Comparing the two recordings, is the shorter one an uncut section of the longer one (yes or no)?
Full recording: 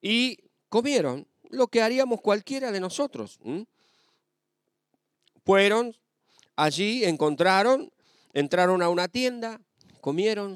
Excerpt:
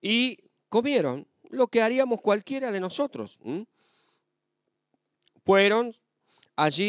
yes